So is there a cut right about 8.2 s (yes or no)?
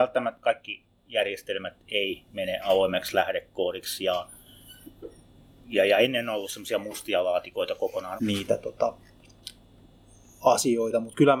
yes